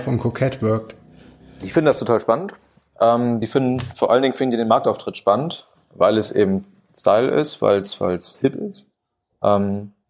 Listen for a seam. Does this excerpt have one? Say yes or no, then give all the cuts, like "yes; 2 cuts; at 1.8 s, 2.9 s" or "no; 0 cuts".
no; 0 cuts